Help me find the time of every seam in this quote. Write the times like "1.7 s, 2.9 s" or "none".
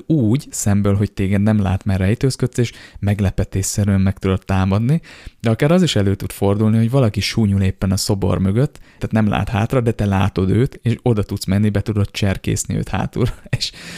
9.0 s